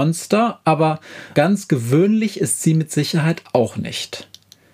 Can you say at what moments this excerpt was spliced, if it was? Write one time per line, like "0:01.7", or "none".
0:01.3